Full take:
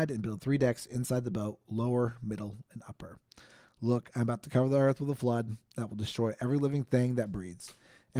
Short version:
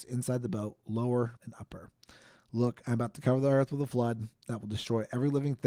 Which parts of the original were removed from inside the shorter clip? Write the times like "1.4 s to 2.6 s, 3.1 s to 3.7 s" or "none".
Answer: 2.2 s to 2.6 s